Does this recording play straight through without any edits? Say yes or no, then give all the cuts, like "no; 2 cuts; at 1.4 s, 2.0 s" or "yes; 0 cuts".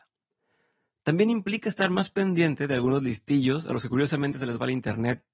yes; 0 cuts